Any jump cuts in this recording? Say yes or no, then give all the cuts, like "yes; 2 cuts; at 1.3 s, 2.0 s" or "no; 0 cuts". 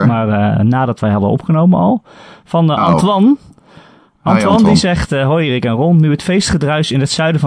no; 0 cuts